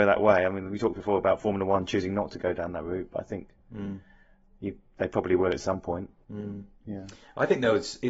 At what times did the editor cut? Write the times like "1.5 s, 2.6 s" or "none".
none